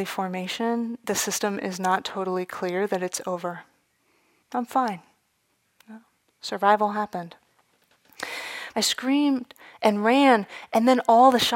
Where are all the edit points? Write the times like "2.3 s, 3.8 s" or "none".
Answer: 4.4 s, 8.7 s

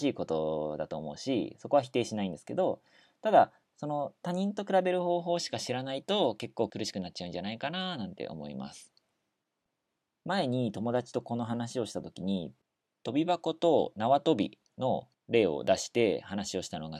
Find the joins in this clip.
none

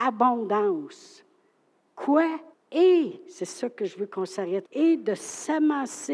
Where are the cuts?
2.5 s, 4.6 s

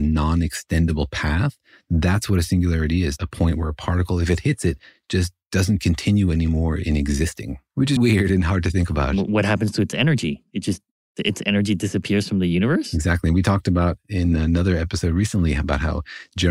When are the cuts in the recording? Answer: 8.0 s

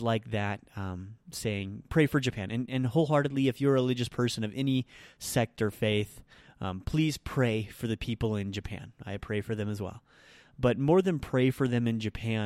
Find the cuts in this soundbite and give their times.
none

